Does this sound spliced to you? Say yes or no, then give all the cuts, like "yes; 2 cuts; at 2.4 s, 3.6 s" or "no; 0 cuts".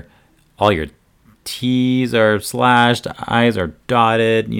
no; 0 cuts